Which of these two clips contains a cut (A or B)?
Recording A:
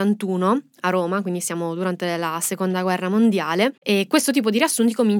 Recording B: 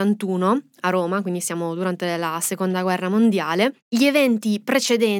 A